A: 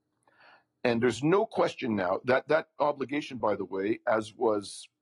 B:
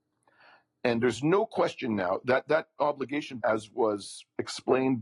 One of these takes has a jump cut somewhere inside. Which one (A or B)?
B